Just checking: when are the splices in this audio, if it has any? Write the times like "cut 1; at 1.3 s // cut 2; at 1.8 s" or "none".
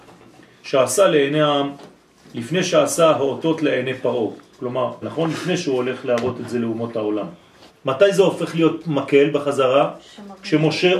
cut 1; at 5.0 s // cut 2; at 7.7 s